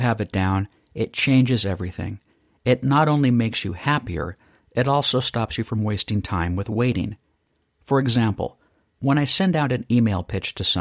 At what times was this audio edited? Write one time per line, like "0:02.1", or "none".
none